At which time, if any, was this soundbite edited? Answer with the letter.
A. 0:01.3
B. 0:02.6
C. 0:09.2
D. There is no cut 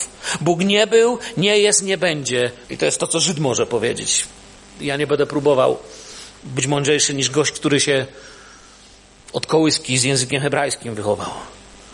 B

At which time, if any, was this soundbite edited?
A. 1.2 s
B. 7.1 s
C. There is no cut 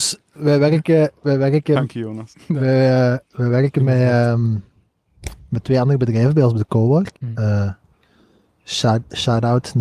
B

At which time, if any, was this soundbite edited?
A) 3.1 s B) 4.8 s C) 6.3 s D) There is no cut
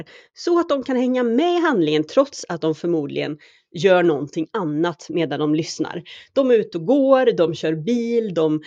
D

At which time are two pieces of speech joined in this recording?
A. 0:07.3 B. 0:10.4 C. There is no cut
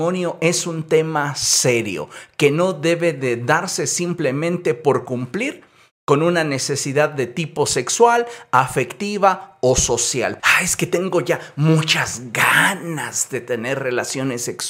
B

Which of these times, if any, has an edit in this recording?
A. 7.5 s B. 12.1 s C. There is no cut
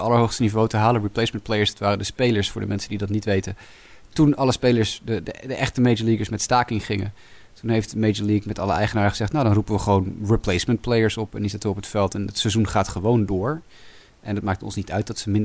C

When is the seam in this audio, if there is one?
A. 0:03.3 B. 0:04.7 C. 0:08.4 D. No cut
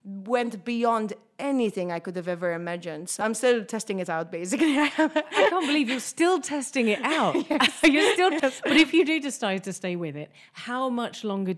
C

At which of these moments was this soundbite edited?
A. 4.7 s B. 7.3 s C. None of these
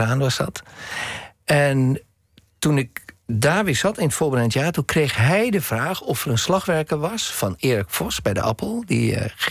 C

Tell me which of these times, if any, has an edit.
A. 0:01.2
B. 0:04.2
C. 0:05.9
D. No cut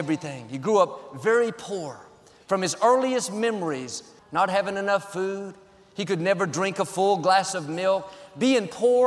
B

